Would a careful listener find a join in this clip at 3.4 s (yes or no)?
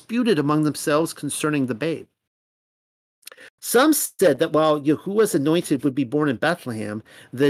no